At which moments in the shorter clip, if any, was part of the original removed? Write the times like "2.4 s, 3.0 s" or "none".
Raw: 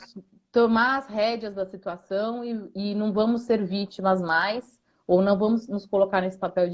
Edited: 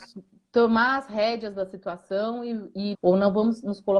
2.9 s